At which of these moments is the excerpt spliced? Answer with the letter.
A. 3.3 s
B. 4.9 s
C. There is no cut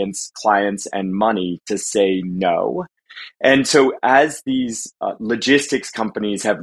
C